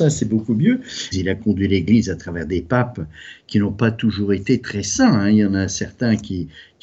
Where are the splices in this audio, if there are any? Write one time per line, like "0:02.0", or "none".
0:01.1